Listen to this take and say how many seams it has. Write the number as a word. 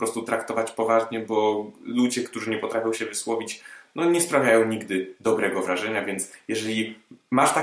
zero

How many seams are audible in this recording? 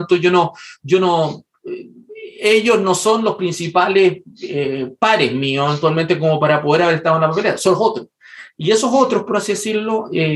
zero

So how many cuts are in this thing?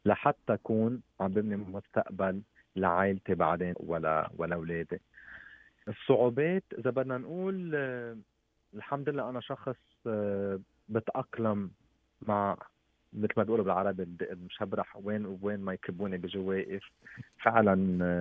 one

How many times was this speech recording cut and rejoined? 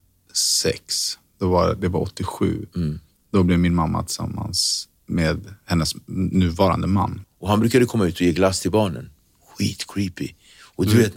one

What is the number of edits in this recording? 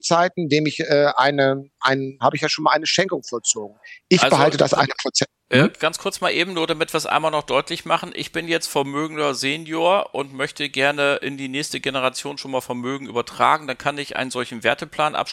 one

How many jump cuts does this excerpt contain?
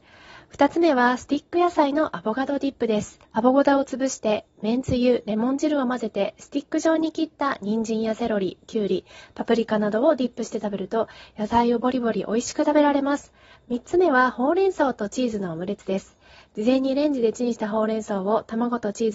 two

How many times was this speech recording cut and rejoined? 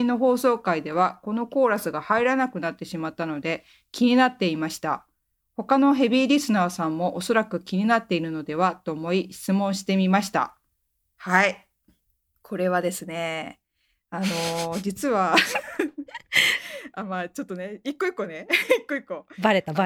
zero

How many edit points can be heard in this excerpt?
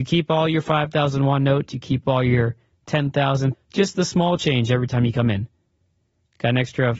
one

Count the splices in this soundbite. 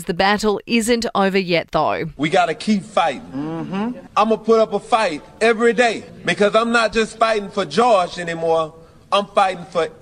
zero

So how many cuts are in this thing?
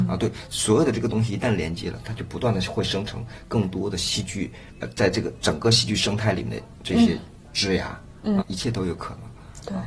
two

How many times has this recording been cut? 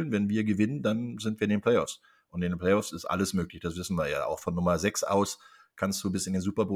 zero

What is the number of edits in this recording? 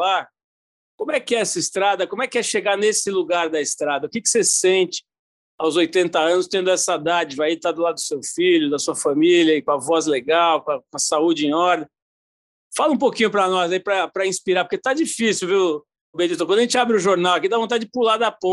one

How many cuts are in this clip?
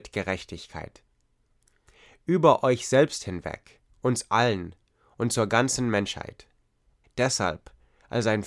one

